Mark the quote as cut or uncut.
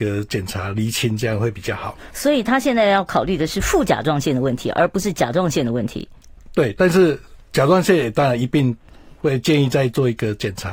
uncut